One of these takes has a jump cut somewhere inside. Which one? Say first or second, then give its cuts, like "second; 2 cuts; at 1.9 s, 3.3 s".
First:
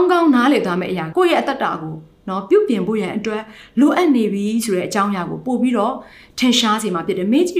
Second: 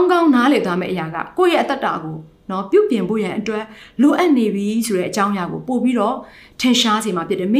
first; 1 cut; at 1.1 s